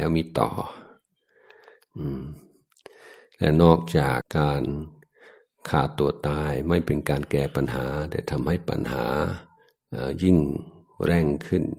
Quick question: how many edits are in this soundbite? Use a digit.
1